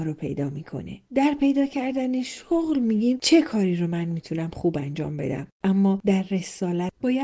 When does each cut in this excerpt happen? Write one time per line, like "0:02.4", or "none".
0:01.0